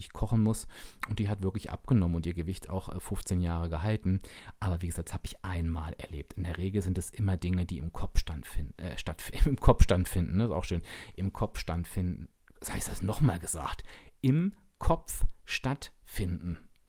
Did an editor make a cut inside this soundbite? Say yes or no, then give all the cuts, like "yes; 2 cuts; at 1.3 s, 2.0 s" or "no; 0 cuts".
no; 0 cuts